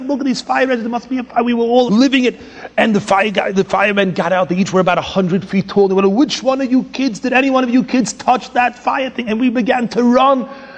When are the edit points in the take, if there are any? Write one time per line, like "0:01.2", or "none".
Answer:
0:01.9